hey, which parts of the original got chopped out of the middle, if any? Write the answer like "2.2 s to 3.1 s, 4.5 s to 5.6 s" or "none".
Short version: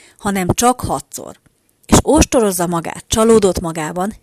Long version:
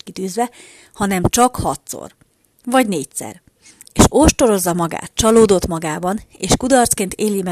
2.6 s to 3.9 s